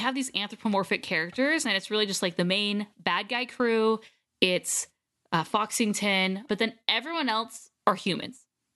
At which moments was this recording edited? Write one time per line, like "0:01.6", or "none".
0:06.5